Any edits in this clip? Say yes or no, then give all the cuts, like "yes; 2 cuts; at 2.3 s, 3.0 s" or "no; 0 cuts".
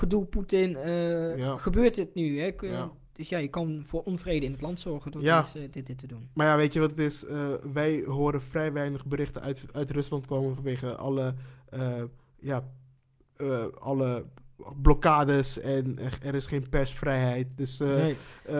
no; 0 cuts